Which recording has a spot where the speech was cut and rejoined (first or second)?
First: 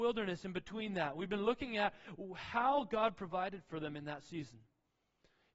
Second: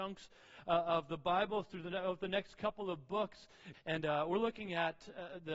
second